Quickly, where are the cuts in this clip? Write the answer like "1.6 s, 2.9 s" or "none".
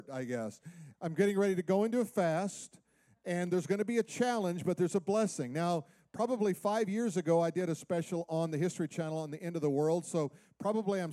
0.9 s